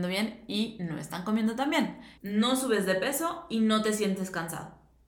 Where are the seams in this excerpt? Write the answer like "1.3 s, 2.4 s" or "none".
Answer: 2.2 s